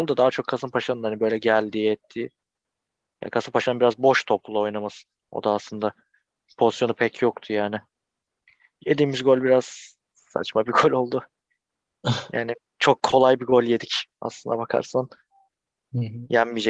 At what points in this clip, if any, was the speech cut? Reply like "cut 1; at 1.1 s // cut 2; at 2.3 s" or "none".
none